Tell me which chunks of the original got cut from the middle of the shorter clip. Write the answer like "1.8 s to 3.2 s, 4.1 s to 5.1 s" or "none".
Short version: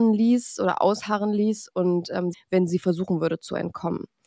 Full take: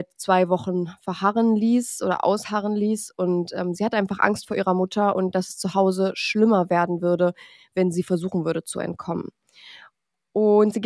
3.8 s to 7.6 s